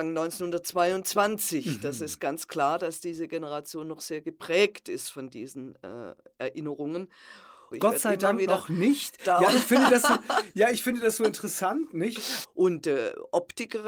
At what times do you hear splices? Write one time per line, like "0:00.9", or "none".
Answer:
0:07.7
0:12.4

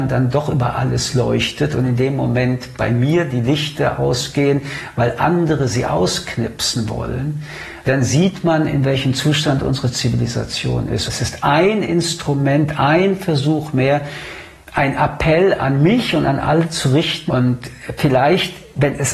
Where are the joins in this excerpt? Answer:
0:11.1
0:17.3

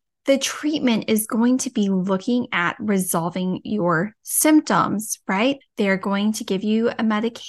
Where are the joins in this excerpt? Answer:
0:05.6

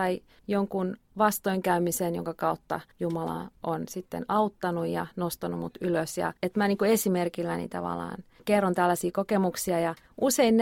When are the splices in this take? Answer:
0:06.4

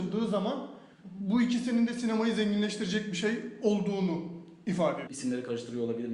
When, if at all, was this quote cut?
0:00.9
0:05.1

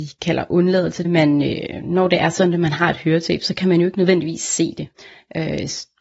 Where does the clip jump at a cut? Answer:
0:01.0

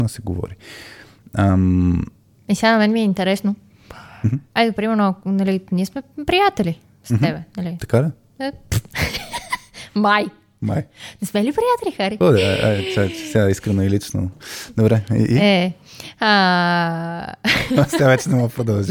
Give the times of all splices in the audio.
none

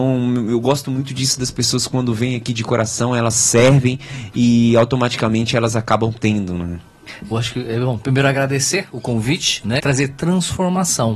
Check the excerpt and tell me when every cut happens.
0:07.3
0:09.8

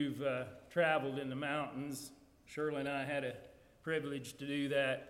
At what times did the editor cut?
none

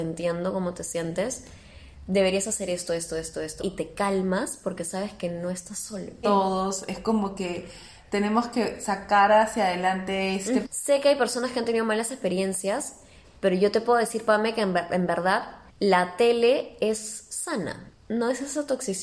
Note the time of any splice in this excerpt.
0:03.6
0:06.2
0:10.6

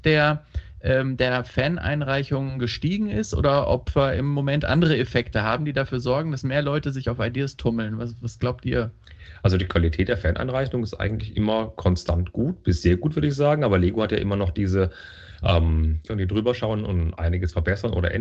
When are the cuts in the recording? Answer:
0:16.1

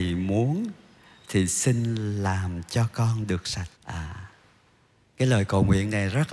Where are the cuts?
0:03.8

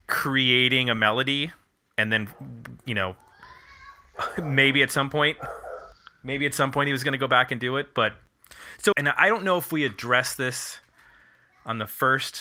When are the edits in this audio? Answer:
0:08.9

